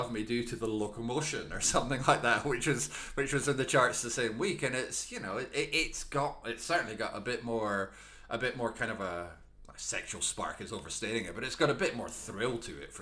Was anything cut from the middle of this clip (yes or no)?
no